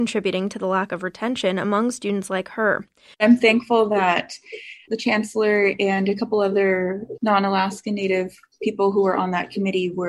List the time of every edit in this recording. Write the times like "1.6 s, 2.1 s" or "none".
3.1 s